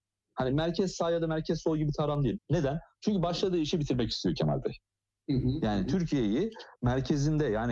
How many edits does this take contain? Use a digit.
1